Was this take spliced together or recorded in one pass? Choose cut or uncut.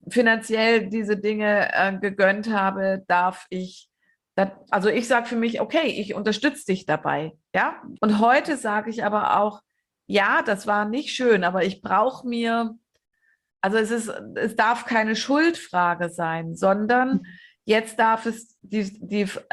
cut